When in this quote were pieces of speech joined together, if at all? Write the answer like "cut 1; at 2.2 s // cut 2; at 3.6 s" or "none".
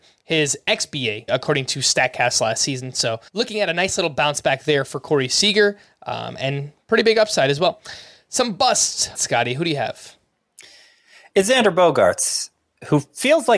cut 1; at 1.3 s // cut 2; at 3.3 s // cut 3; at 9.1 s